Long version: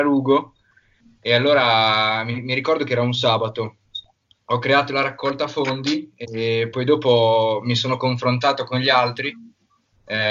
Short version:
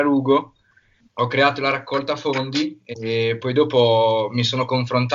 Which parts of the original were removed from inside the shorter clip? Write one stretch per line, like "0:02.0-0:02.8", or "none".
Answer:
0:01.0-0:04.4